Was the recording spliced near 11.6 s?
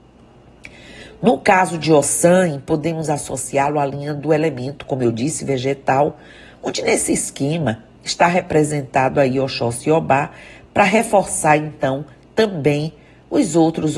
no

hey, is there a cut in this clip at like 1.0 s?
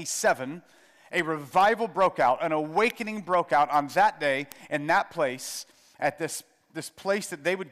no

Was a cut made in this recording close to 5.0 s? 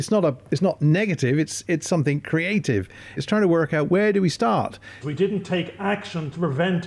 yes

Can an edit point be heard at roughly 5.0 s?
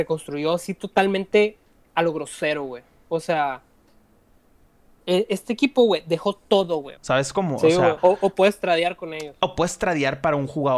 no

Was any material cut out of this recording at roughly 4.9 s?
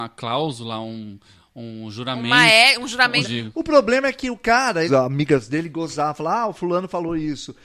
yes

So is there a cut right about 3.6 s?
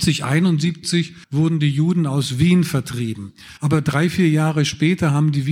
yes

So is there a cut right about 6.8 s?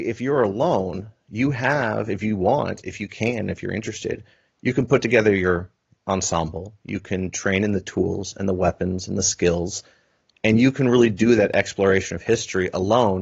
no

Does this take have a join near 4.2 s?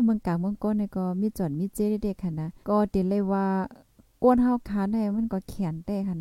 no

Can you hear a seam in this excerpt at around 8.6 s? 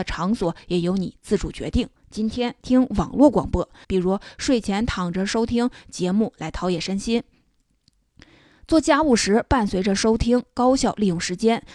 no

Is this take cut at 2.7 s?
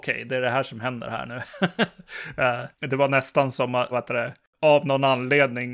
yes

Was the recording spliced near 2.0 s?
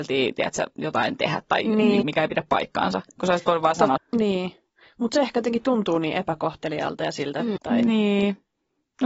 yes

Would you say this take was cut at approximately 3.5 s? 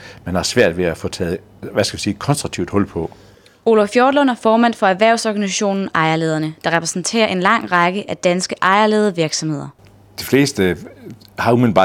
no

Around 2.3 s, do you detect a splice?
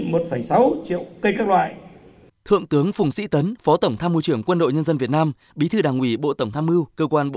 yes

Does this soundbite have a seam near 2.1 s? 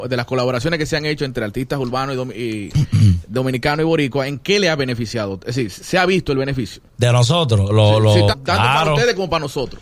no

